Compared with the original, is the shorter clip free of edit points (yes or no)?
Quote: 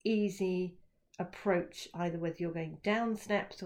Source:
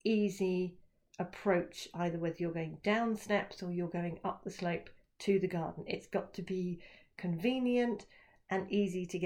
yes